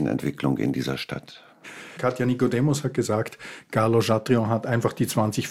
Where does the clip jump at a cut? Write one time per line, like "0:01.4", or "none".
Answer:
0:02.0